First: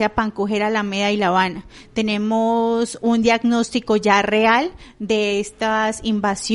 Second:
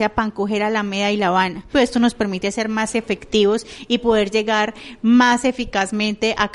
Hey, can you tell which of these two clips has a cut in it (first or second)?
second